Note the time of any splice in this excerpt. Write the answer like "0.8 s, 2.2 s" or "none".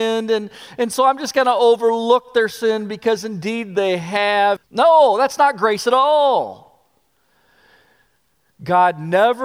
4.6 s